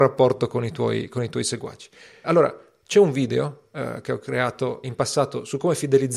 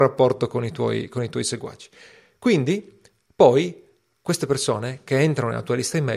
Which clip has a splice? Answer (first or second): first